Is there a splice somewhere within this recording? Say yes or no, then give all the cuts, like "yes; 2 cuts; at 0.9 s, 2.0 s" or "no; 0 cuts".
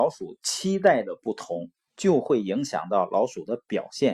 yes; 1 cut; at 1.9 s